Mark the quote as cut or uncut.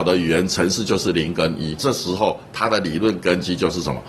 cut